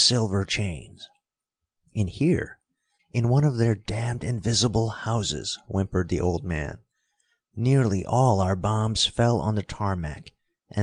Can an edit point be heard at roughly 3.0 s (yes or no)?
yes